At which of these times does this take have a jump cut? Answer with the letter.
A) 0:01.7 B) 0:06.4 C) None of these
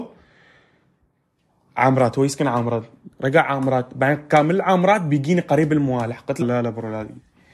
B